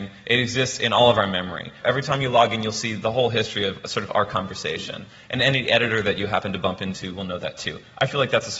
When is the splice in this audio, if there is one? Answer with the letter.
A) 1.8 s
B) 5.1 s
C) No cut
A